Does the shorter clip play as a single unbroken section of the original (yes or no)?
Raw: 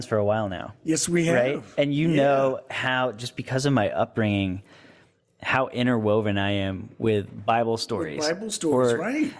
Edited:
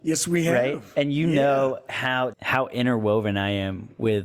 no